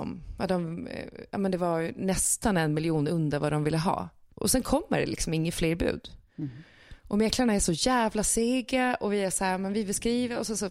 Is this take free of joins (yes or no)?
yes